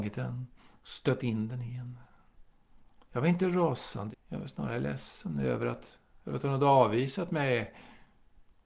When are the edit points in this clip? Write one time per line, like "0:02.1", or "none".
0:04.1